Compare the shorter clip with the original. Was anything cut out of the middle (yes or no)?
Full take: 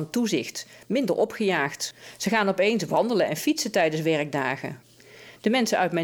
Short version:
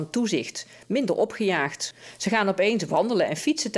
no